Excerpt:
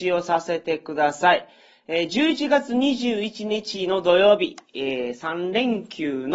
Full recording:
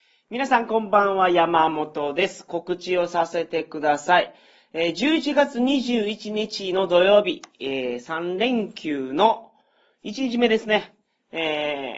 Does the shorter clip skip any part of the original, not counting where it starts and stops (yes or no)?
no